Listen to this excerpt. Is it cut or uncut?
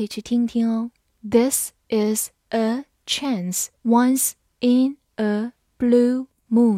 cut